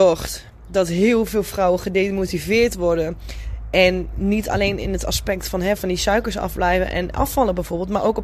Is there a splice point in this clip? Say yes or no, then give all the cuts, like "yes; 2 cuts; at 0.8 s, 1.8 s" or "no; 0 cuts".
no; 0 cuts